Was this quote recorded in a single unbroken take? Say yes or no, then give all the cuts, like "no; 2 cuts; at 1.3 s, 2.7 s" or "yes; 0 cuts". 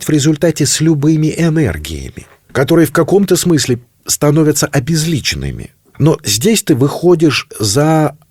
yes; 0 cuts